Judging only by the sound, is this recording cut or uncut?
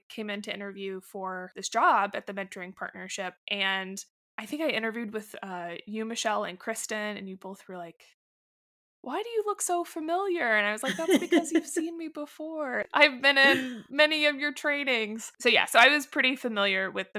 uncut